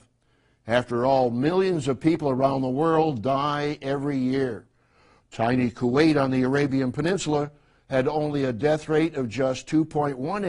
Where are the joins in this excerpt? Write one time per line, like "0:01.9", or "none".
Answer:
0:05.2